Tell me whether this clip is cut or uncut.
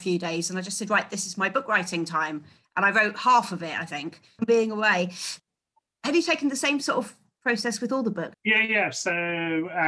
cut